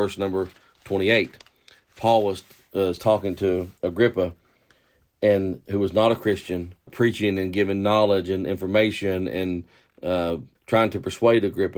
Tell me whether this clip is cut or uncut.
cut